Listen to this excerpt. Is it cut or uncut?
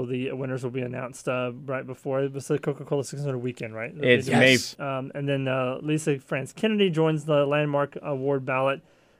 cut